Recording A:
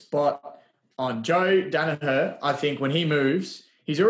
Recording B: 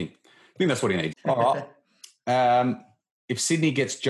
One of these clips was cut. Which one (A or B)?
B